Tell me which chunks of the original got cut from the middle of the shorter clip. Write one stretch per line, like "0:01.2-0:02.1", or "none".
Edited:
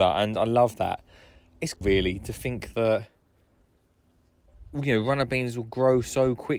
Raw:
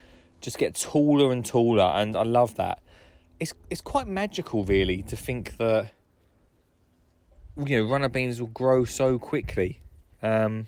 0:03.6-0:04.6